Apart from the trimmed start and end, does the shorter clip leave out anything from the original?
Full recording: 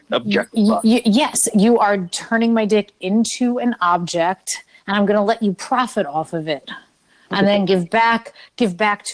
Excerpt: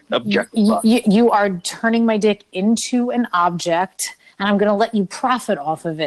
yes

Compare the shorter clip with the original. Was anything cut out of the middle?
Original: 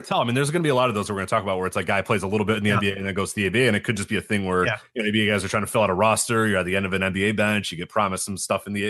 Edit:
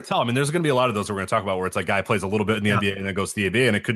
no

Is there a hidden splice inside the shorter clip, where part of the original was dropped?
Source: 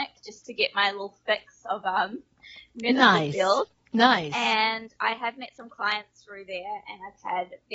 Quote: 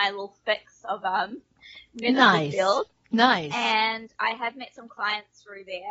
no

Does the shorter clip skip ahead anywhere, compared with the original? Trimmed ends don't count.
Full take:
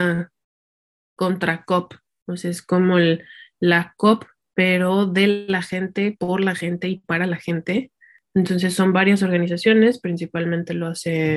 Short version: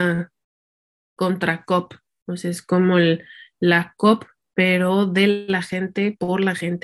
no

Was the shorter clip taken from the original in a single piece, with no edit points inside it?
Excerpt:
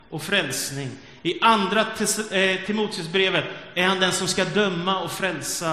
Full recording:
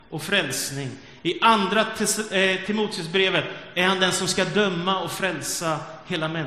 yes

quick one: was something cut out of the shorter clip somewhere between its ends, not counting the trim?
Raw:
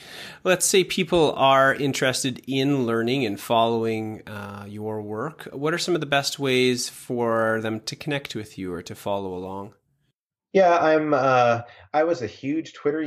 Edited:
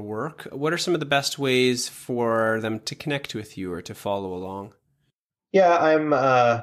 no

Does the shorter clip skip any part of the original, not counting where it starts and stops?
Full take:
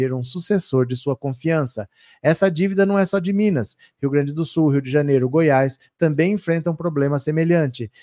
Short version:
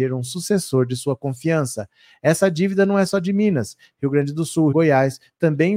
yes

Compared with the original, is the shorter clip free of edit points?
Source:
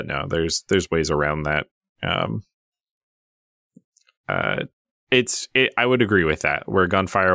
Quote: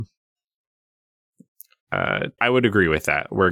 no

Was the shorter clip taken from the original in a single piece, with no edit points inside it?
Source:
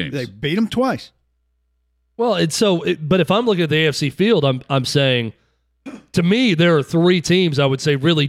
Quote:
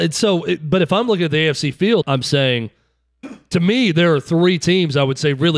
no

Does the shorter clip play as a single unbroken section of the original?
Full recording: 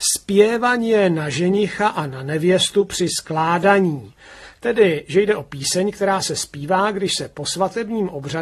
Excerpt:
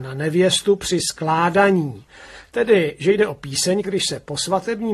no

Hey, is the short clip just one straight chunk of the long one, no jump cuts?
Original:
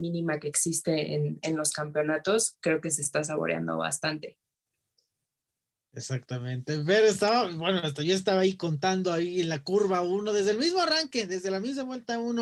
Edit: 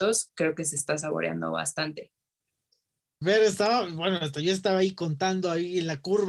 no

